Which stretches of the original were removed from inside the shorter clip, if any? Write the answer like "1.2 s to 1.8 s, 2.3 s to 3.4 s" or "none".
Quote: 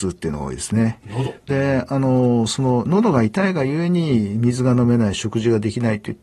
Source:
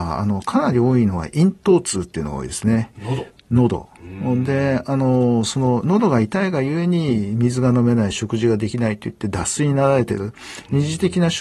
3.4 s to 4.5 s